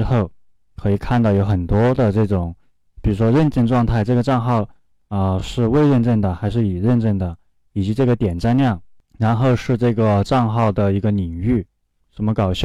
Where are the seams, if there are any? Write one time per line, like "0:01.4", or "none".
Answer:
none